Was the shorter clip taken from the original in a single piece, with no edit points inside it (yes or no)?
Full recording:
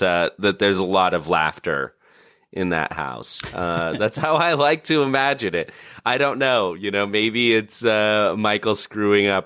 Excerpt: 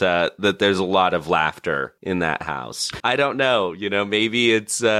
no